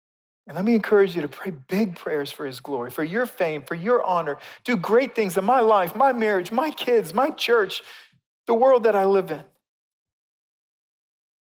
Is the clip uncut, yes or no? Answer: no